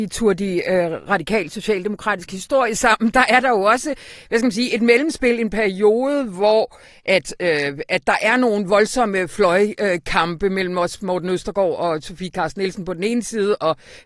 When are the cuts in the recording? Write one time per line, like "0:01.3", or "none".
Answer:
none

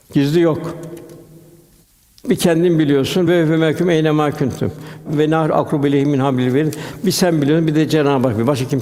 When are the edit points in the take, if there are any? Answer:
none

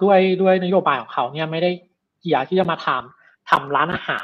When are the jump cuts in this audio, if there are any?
none

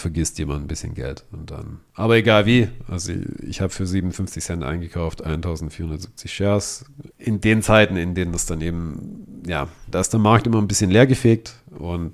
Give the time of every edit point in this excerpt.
0:07.1
0:09.9

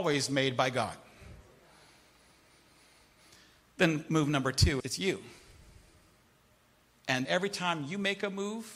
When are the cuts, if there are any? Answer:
0:04.8
0:07.2

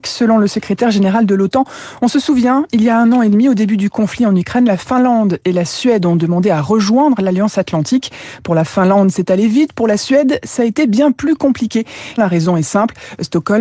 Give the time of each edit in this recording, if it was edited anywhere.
0:12.2

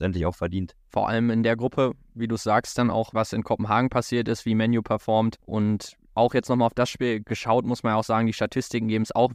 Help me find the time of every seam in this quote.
0:03.1
0:05.4

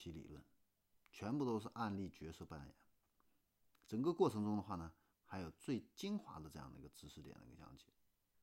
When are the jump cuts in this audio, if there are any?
0:05.1

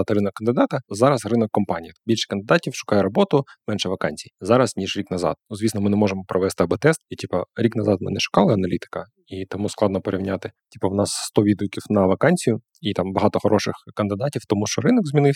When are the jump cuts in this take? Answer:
none

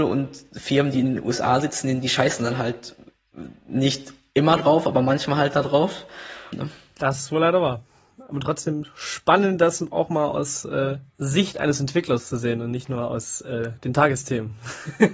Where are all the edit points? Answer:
0:06.5
0:11.1

